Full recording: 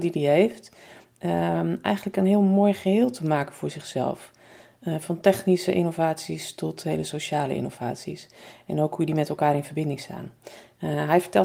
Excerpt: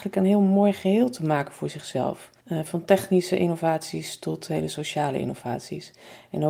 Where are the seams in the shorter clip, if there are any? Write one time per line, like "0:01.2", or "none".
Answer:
0:02.4

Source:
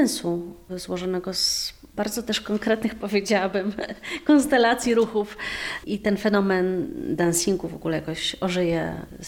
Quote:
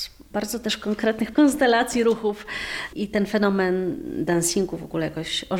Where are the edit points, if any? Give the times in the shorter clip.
0:01.3

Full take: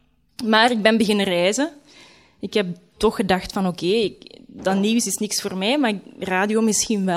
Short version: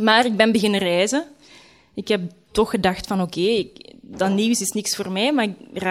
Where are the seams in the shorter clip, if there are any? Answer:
none

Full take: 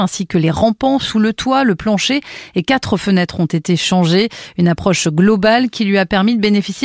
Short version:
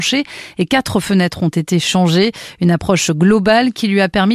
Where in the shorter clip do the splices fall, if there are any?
none

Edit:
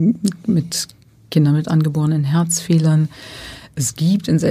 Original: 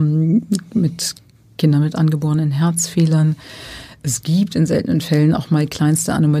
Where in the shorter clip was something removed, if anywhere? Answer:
none

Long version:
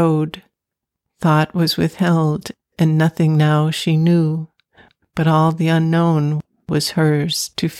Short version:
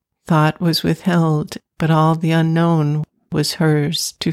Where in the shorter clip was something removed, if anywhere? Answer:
0:01.7

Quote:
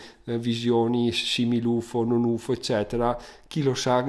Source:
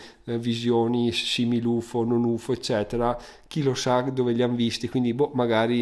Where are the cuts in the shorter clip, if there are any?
none

